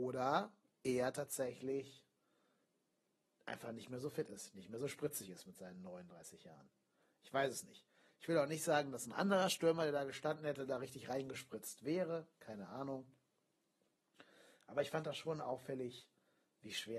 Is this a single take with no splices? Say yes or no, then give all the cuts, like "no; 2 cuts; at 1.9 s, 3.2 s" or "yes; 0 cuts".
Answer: yes; 0 cuts